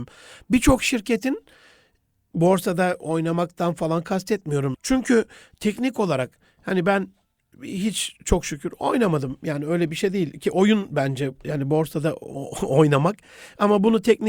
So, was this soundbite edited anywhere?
yes; 1 cut; at 4.7 s

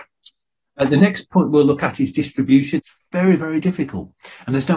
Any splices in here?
yes; 1 cut; at 2.8 s

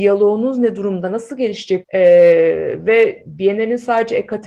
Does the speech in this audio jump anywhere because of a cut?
yes; 1 cut; at 1.8 s

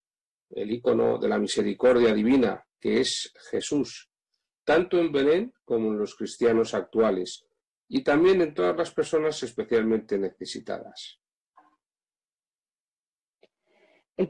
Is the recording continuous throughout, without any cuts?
yes; 0 cuts

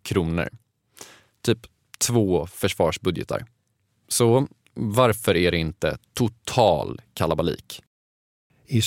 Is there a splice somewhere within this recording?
no; 0 cuts

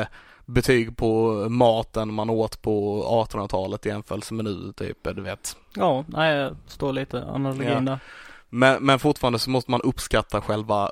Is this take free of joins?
yes; 0 cuts

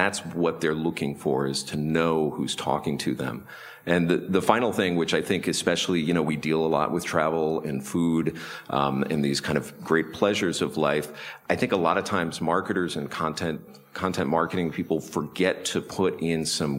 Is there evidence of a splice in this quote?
no; 0 cuts

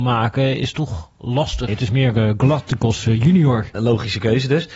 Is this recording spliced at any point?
yes; 2 cuts; at 1.7 s, 3.7 s

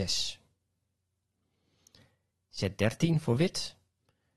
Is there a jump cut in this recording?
yes; 1 cut; at 2.3 s

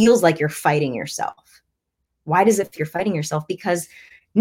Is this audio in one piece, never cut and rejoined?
no; 1 cut; at 2.8 s

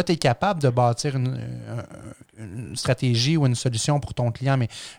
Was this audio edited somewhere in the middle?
no; 0 cuts

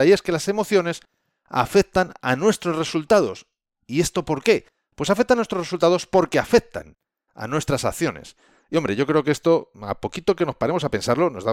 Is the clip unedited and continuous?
yes; 0 cuts

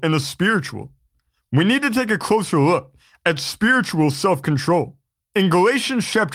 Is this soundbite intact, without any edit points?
no; 1 cut; at 5.2 s

